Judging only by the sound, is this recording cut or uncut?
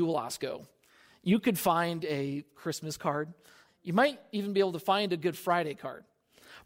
cut